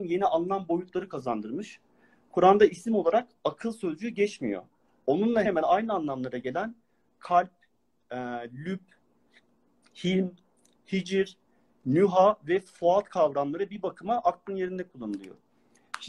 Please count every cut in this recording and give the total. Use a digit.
1